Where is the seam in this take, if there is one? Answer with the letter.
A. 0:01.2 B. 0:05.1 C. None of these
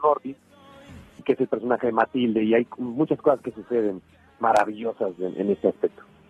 A